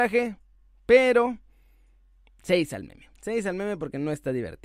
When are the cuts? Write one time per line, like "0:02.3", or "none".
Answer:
0:03.1